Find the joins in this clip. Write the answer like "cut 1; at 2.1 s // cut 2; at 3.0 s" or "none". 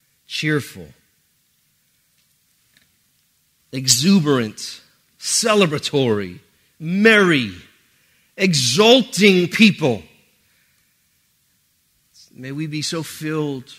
none